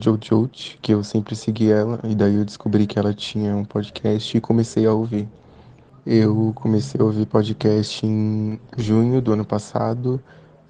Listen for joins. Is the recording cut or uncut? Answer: cut